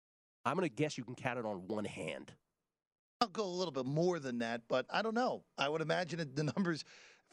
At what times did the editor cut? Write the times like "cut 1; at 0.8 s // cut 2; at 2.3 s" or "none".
none